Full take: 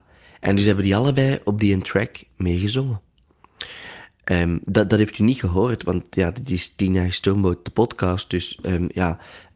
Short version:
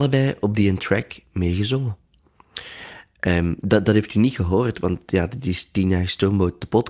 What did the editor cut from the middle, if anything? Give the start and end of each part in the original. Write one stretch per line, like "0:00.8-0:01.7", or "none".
none

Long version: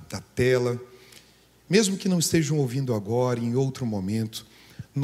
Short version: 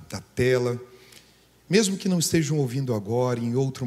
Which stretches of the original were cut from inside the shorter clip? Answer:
none

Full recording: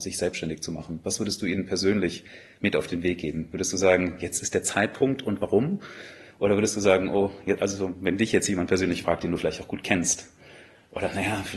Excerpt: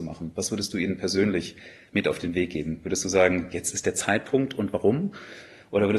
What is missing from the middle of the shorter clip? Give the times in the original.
none

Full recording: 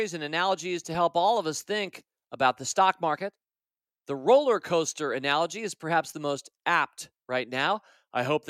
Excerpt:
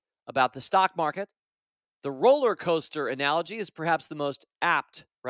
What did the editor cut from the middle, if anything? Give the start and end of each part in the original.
none

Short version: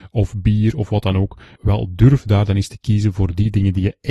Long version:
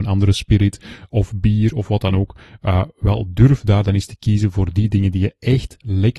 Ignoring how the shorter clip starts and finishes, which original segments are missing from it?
0:02.5-0:02.9

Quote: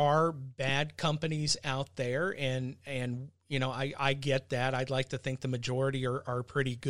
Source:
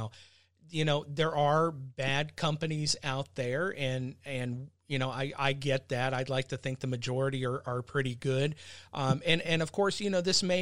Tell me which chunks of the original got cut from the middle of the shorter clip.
none

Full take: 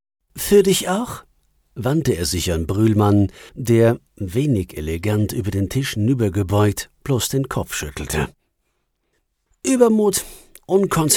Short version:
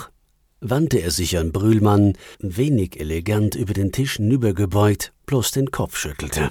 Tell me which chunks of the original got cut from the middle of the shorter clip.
0:03.5-0:04.1

